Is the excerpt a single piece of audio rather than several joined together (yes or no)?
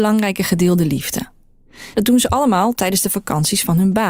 no